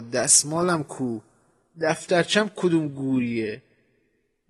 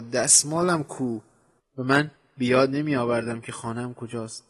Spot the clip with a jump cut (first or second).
second